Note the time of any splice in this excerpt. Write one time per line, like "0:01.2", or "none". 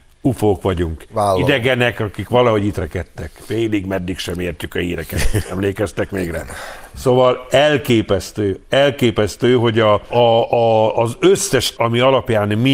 0:10.1
0:11.8